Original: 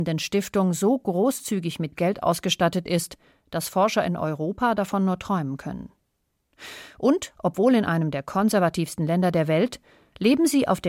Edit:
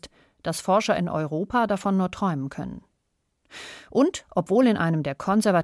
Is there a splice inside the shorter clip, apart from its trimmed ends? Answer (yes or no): no